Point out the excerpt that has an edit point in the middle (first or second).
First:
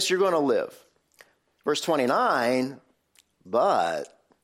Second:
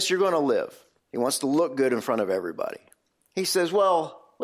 second